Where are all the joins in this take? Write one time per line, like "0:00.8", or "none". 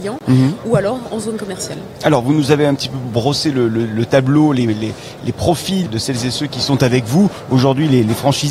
0:05.9